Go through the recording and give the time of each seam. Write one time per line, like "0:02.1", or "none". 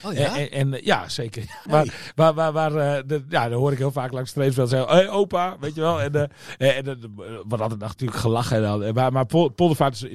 0:01.7